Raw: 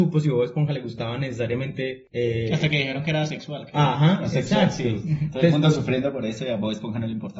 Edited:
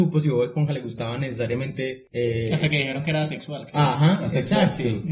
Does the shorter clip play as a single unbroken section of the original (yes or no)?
yes